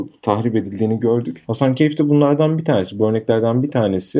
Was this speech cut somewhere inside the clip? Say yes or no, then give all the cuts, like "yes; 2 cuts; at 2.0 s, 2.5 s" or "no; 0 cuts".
no; 0 cuts